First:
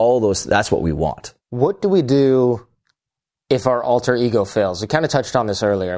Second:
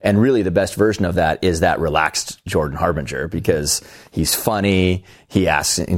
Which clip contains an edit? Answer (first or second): first